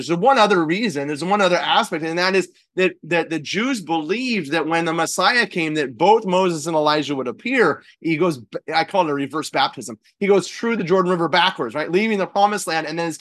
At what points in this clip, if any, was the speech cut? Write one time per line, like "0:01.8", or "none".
0:07.9